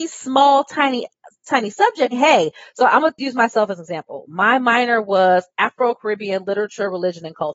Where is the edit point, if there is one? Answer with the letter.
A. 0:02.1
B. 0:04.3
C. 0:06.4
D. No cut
A